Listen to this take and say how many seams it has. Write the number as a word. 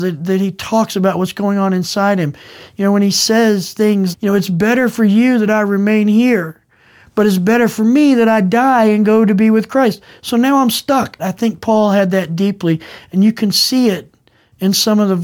two